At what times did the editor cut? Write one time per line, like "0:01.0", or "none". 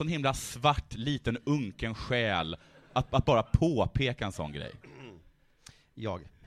none